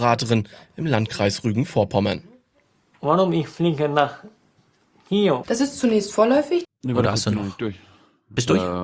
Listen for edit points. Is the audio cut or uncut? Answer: cut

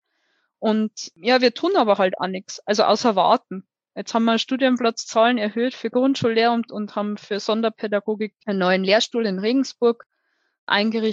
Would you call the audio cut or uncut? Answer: uncut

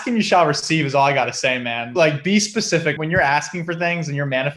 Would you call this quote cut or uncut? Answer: uncut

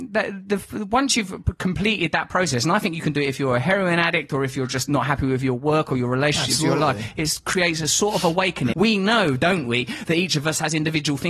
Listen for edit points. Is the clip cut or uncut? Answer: cut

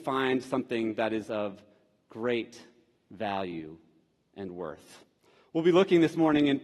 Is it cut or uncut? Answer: uncut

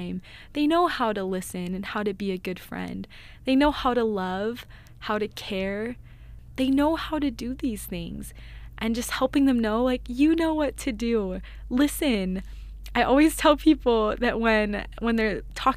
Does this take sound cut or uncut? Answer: uncut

